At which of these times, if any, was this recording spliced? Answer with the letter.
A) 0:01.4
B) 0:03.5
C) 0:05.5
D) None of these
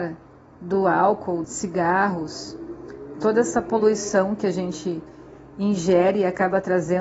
A